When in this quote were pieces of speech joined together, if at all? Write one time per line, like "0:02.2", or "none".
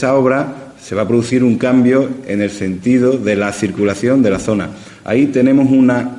none